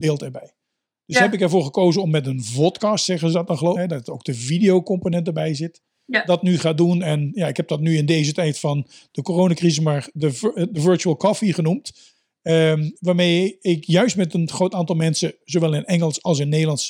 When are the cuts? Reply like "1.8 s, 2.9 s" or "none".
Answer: 3.8 s